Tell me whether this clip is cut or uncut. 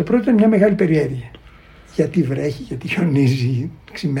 uncut